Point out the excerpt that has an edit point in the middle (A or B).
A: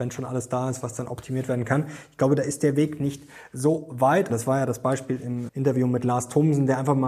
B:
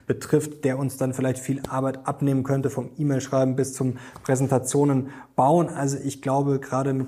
A